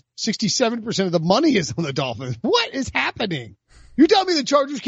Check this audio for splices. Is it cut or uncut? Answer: uncut